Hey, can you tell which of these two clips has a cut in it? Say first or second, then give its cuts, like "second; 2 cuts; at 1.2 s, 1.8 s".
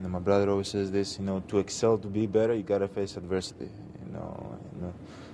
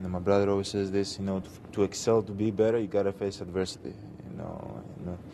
first; 1 cut; at 1.4 s